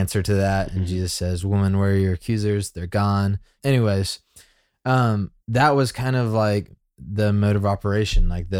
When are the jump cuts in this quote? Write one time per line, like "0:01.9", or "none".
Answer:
0:03.6
0:05.4